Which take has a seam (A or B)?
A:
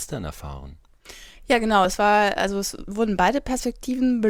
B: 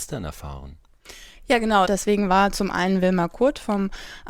B